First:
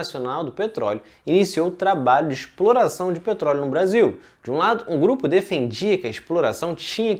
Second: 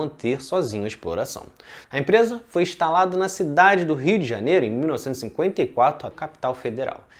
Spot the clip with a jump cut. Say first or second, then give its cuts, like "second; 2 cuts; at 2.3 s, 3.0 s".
second; 2 cuts; at 1.8 s, 6.1 s